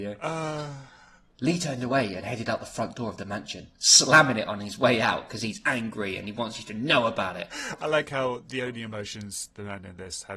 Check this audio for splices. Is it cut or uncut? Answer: uncut